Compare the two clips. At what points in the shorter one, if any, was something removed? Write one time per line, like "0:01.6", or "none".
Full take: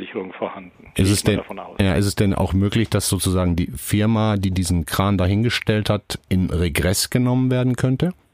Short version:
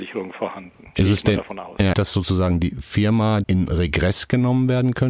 0:01.9
0:03.4